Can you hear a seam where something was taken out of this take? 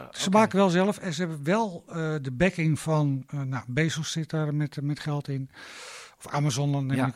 no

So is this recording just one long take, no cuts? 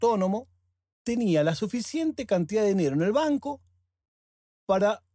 no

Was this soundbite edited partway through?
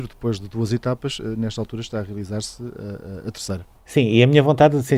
no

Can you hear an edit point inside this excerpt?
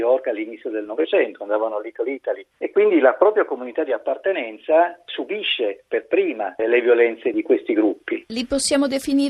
no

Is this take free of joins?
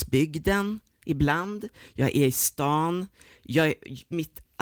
yes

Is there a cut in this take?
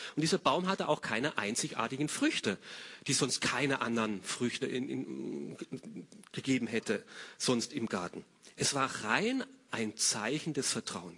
no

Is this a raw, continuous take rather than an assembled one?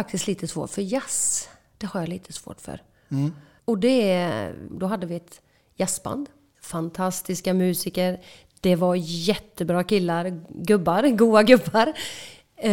no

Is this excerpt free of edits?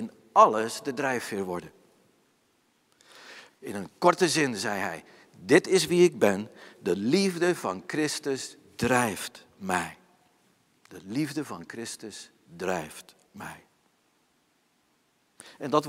no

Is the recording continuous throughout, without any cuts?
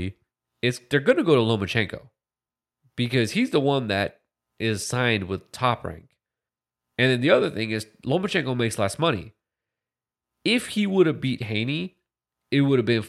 yes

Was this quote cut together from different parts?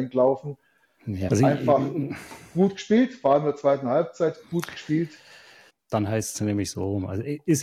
yes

